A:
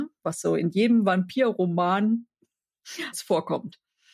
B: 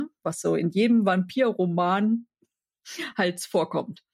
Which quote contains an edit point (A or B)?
A